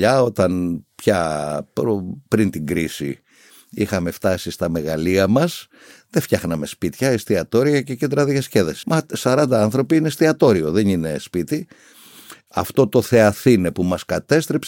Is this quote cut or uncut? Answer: cut